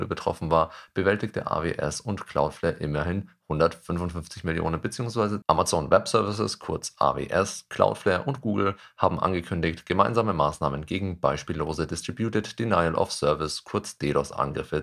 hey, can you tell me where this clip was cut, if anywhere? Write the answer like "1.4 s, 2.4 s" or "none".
5.4 s

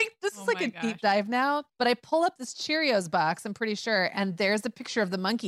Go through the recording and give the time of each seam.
1.7 s

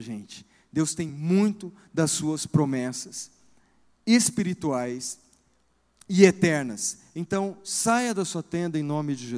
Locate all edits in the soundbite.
none

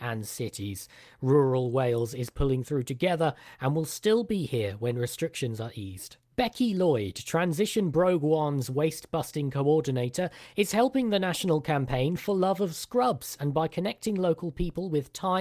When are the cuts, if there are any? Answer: none

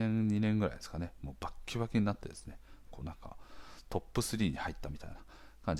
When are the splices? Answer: 2.9 s

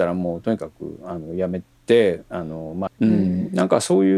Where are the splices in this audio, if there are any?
2.9 s

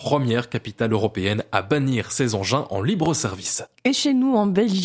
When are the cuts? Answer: none

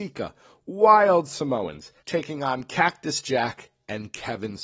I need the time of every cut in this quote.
2.0 s

